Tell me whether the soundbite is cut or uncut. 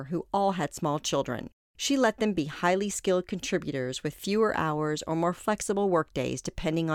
uncut